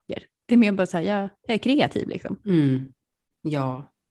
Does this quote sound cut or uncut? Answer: uncut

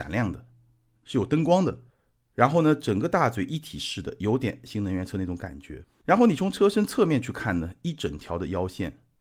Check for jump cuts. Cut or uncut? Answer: uncut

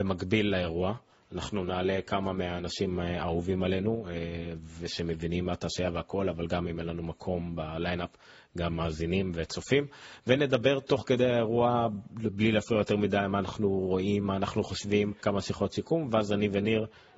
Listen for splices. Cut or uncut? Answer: cut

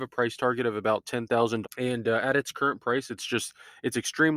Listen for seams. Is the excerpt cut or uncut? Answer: cut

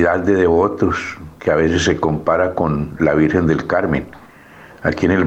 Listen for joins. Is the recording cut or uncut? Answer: uncut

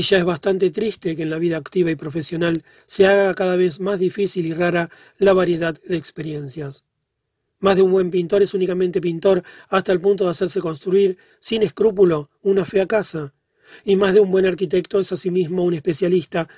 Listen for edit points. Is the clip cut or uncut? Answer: uncut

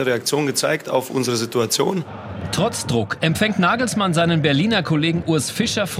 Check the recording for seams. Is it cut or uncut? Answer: uncut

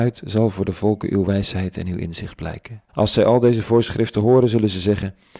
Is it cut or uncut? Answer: cut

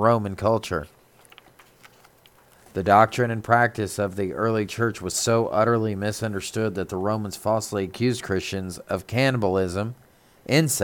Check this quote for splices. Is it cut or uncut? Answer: uncut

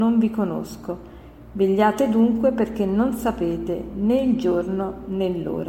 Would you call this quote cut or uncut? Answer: uncut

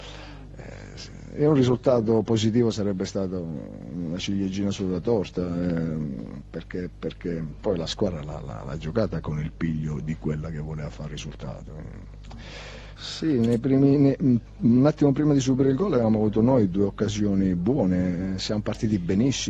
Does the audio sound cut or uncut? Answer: cut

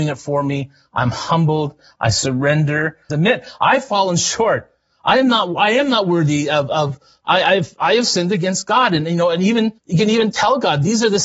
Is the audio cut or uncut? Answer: cut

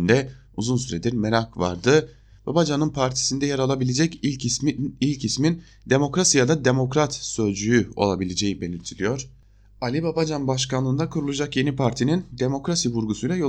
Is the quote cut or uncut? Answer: uncut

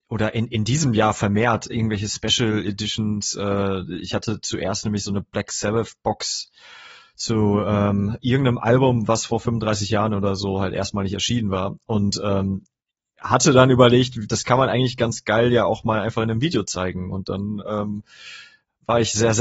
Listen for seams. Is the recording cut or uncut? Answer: uncut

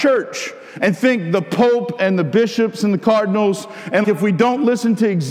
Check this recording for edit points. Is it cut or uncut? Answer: cut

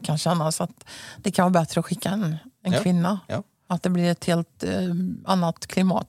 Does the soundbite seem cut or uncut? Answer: cut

